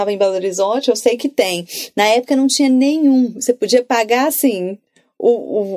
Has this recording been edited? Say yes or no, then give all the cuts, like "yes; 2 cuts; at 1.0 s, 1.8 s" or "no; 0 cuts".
no; 0 cuts